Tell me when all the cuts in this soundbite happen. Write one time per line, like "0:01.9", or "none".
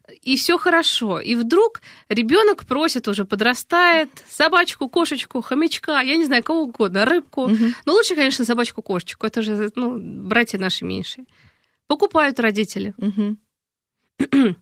none